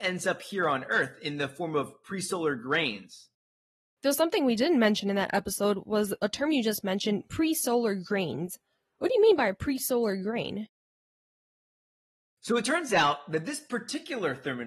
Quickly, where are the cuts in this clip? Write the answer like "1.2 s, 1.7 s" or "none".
4.0 s, 12.2 s

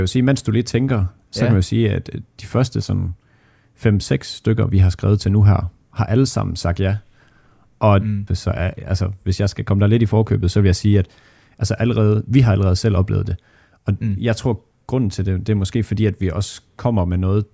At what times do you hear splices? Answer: 8.3 s

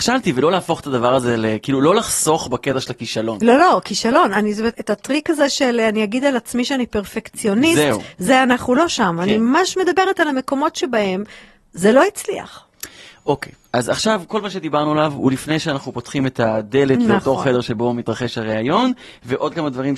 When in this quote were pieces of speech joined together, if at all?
4.7 s

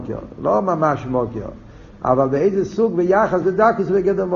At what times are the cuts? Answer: 3.4 s

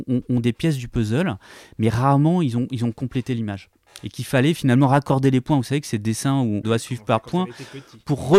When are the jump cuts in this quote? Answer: 6.6 s

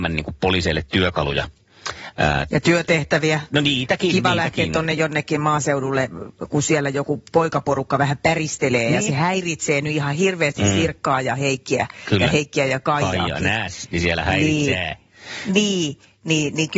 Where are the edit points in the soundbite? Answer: none

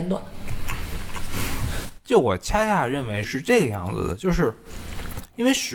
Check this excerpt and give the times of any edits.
3.2 s

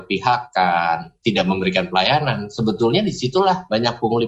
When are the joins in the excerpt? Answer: 1.2 s

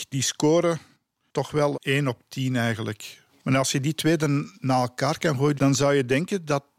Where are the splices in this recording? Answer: 1.7 s, 3.3 s, 5.6 s

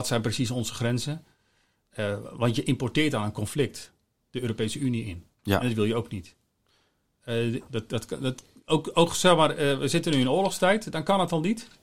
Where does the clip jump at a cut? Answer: 7.7 s

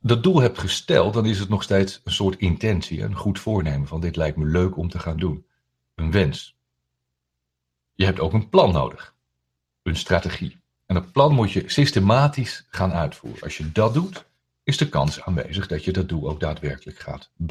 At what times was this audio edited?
none

